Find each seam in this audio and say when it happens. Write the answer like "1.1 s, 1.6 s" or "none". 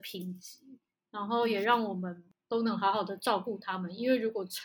none